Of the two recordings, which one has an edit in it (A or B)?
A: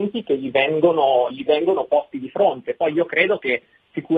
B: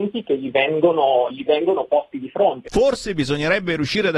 B